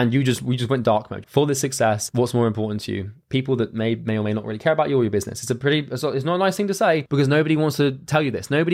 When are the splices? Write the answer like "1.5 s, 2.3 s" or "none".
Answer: 1.2 s